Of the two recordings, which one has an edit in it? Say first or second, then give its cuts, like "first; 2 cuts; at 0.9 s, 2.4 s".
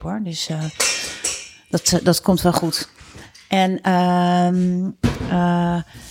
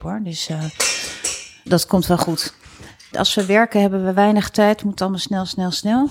second; 2 cuts; at 1.7 s, 3.1 s